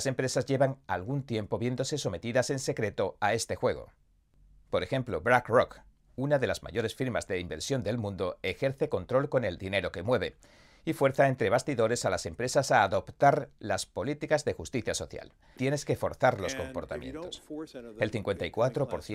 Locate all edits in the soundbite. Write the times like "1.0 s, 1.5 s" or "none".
15.6 s, 17.7 s

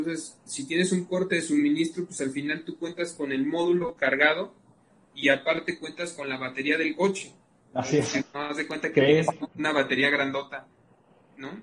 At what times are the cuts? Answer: 8.3 s

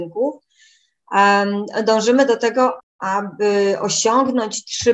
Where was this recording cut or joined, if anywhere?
2.8 s

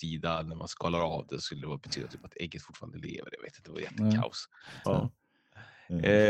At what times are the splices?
4.8 s

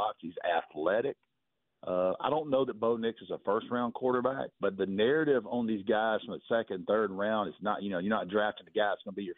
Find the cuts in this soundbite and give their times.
4.5 s

